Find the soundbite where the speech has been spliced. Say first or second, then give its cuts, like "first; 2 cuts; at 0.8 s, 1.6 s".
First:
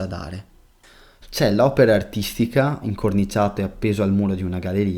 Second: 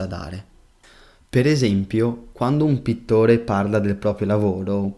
first; 2 cuts; at 1.2 s, 2.8 s